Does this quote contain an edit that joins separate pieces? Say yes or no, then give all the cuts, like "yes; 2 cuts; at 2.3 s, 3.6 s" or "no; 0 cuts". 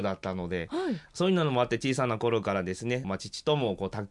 yes; 1 cut; at 3.0 s